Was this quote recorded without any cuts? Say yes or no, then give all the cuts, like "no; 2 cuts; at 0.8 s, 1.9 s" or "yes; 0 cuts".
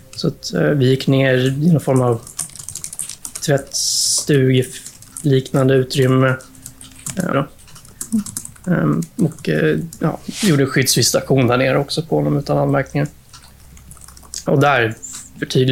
no; 2 cuts; at 7.3 s, 14.5 s